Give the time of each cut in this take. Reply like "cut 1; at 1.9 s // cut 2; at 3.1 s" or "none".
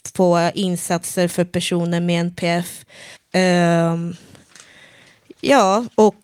cut 1; at 3.2 s